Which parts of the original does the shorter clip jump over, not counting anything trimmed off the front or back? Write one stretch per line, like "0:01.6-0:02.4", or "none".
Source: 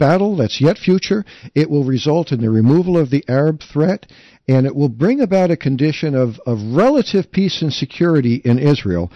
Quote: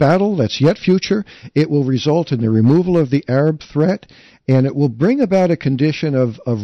none